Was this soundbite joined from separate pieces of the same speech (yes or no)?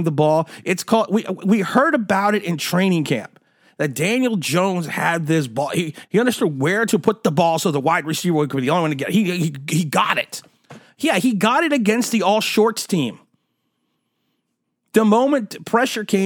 yes